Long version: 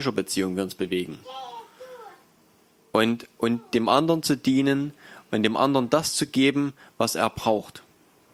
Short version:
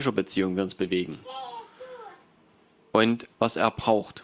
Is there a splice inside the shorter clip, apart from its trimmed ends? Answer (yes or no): yes